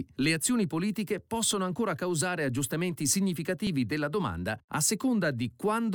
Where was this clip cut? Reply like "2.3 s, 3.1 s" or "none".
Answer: none